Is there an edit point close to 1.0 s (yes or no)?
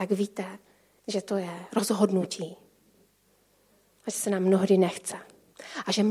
yes